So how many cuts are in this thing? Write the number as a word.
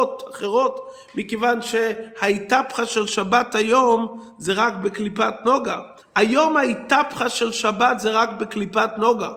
one